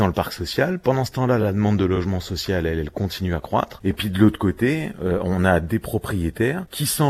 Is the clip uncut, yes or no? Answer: no